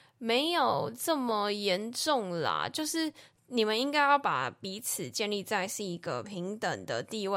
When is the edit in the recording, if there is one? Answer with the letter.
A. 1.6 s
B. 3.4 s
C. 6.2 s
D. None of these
D